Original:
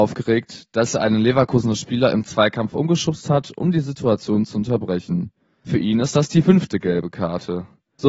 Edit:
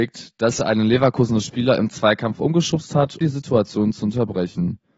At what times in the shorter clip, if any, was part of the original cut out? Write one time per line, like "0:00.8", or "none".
0:03.2